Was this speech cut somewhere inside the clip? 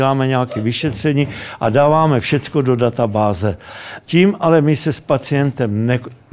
yes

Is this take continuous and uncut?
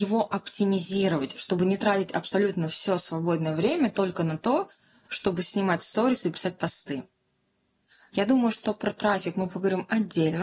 no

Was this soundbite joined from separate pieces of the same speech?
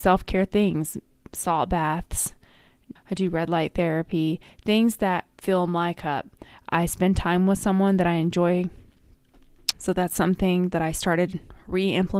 yes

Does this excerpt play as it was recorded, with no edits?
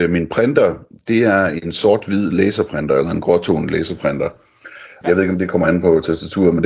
no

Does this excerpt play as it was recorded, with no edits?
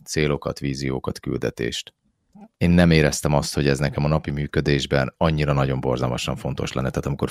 no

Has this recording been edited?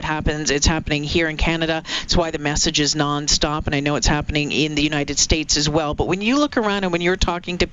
no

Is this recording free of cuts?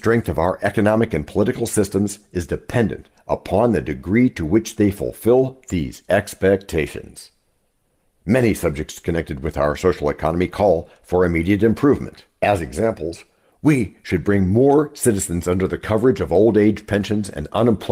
yes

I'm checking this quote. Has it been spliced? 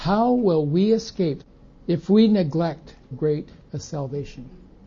yes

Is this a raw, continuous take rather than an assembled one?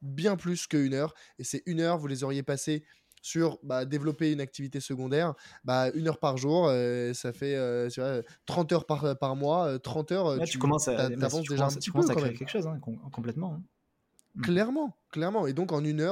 yes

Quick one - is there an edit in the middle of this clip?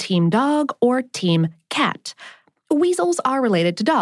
no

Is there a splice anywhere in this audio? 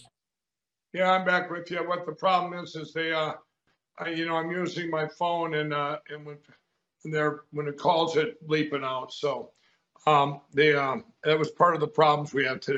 no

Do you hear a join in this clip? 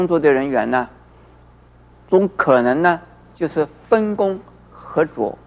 no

